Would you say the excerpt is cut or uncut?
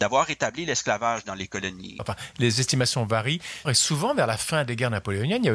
cut